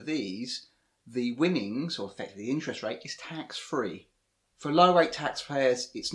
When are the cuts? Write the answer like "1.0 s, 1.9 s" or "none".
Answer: 4.4 s